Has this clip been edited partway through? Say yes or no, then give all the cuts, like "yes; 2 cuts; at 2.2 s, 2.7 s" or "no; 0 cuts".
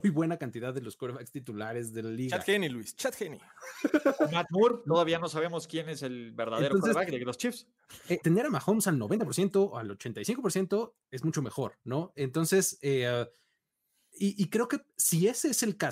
yes; 1 cut; at 8.2 s